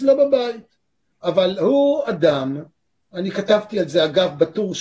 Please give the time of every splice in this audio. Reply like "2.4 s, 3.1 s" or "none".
1.2 s